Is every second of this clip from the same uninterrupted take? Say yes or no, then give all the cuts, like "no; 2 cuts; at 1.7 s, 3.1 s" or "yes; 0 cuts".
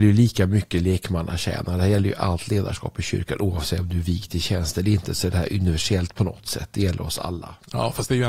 yes; 0 cuts